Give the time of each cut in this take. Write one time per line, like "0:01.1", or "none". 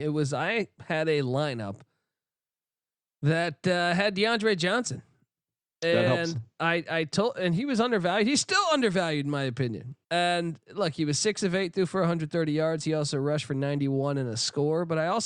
0:10.0